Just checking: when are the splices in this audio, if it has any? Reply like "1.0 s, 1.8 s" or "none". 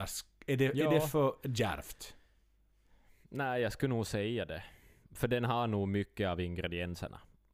none